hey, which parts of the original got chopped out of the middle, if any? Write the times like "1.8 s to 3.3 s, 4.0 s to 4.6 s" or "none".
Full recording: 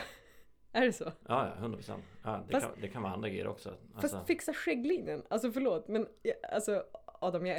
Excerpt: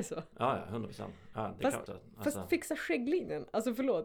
2.8 s to 3.6 s